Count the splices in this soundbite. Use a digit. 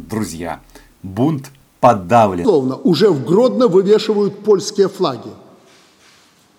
0